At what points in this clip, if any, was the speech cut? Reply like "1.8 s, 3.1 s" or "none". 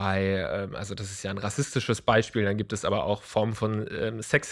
none